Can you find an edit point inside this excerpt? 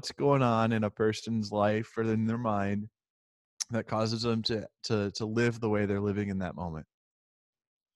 no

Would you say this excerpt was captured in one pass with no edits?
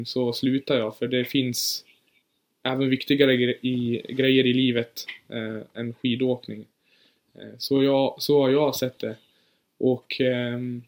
yes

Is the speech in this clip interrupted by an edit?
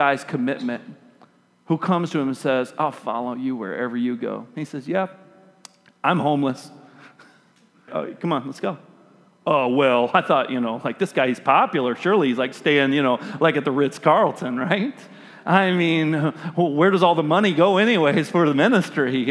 yes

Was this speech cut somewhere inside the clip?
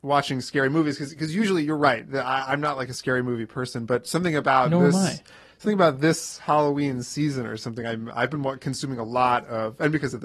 no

